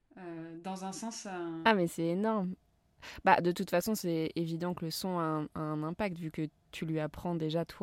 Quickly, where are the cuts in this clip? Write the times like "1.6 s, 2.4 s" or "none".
none